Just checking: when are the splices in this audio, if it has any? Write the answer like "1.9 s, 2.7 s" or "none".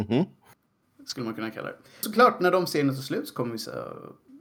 none